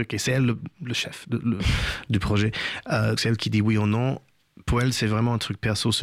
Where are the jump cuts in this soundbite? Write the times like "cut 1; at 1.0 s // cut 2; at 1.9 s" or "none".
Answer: cut 1; at 3.2 s